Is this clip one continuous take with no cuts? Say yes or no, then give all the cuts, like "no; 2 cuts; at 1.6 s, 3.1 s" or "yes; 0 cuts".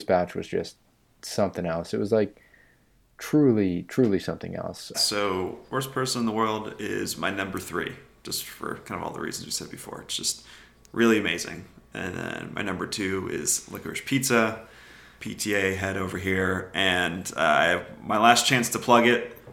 no; 2 cuts; at 4.9 s, 15.2 s